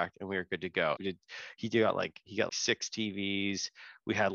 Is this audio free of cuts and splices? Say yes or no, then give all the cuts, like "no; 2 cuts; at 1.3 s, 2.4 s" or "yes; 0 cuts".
no; 2 cuts; at 1.0 s, 2.5 s